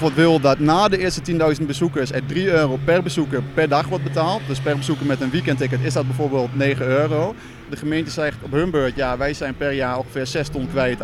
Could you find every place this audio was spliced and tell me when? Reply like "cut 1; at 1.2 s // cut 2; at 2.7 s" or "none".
cut 1; at 7.7 s